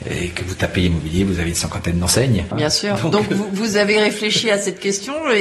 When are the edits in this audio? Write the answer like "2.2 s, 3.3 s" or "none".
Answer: 2.5 s

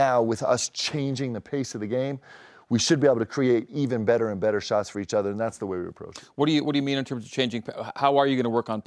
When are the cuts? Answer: none

